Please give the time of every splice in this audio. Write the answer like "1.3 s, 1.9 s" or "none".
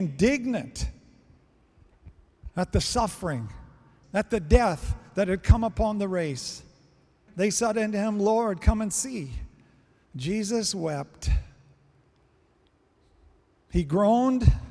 4.0 s, 7.3 s